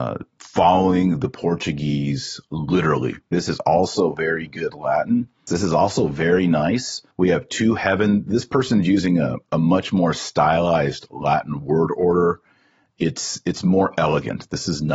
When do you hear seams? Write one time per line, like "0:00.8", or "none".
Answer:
0:03.3
0:05.5
0:07.1